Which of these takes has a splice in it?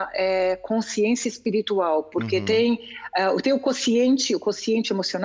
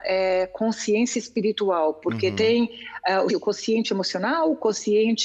second; 1 cut; at 3.3 s

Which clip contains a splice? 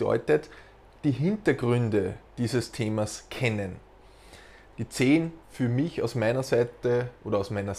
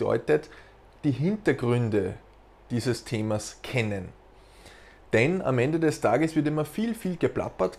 first; 2 cuts; at 2.3 s, 4.7 s

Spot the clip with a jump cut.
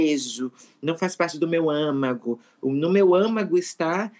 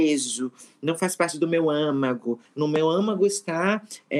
second; 1 cut; at 2.5 s

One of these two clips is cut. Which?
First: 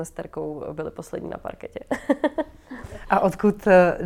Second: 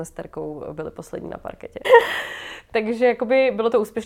second; 1 cut; at 1.8 s

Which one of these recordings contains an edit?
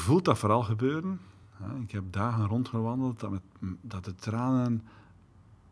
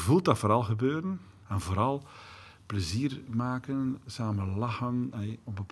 second; 1 cut; at 1.4 s

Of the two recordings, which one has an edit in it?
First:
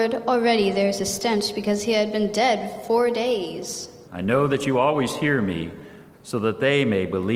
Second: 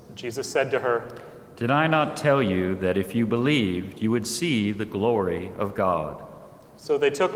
first; 2 cuts; at 4.1 s, 6.1 s

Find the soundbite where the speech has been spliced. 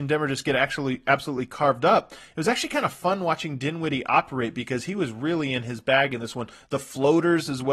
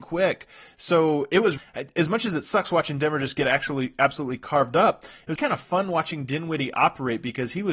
second; 2 cuts; at 1.6 s, 5.4 s

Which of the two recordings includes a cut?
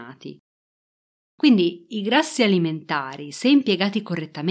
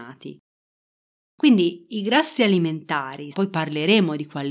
second; 1 cut; at 3.3 s

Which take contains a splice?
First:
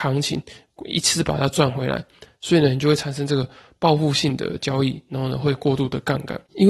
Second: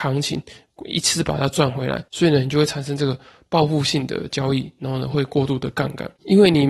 second; 1 cut; at 2.1 s

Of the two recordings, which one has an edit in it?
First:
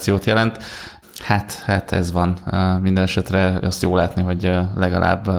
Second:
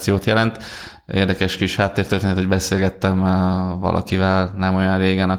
first; 1 cut; at 1.0 s

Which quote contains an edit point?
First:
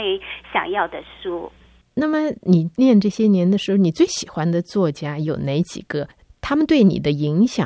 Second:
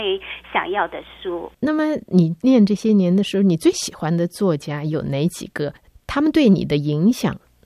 second; 1 cut; at 1.5 s

